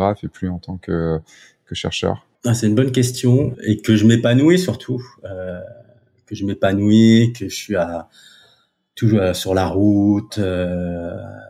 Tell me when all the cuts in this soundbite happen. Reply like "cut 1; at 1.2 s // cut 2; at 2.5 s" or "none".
cut 1; at 3.5 s